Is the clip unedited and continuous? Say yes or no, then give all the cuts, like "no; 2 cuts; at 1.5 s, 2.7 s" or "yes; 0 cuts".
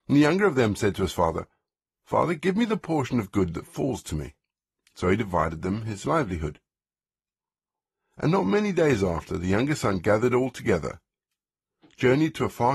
yes; 0 cuts